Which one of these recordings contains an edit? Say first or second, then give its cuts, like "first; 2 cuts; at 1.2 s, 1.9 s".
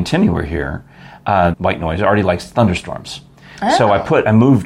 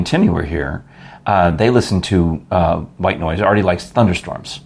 first; 1 cut; at 1.5 s